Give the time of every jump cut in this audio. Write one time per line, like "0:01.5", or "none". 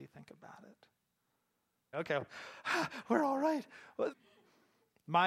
0:01.9
0:04.1